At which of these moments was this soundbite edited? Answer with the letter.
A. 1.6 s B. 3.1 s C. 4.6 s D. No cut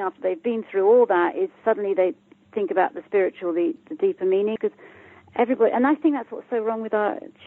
C